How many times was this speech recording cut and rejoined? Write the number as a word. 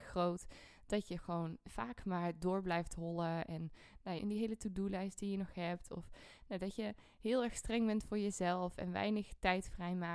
one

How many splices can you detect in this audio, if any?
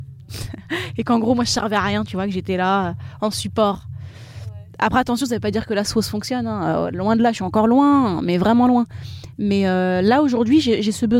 zero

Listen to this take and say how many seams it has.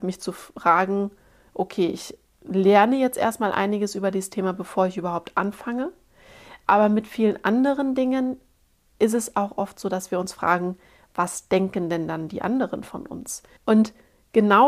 one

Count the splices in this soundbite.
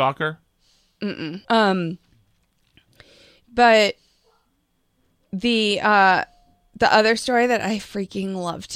one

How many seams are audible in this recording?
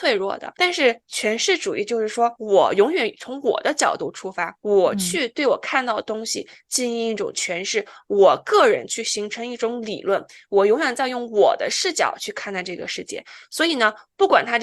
one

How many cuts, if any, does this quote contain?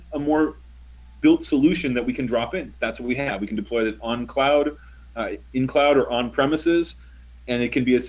zero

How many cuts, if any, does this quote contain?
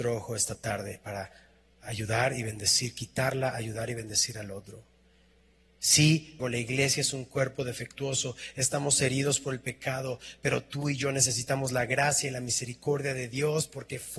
one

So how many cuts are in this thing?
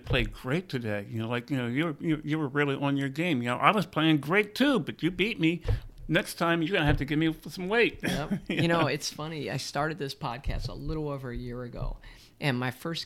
zero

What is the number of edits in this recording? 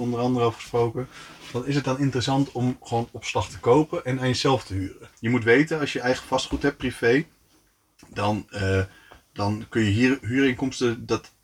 one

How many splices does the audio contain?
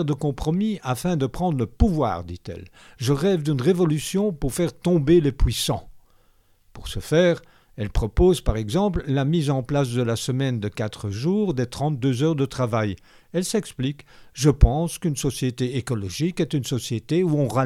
zero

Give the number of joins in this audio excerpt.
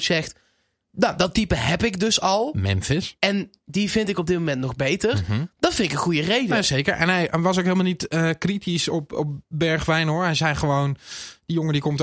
zero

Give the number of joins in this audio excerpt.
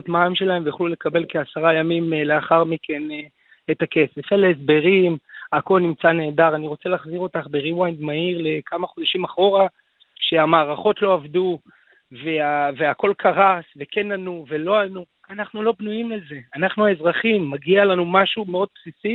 zero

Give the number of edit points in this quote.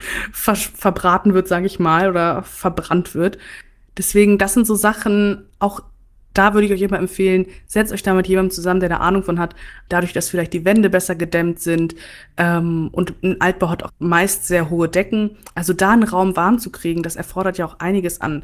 two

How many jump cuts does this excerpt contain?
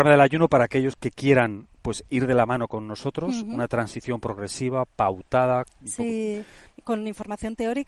zero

